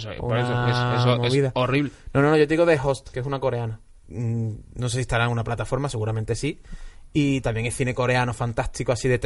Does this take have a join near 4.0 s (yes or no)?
yes